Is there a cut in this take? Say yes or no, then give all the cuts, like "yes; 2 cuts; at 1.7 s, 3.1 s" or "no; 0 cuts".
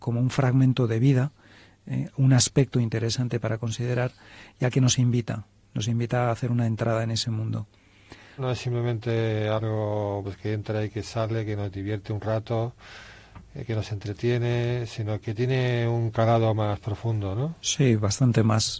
yes; 3 cuts; at 8.4 s, 10.2 s, 15.2 s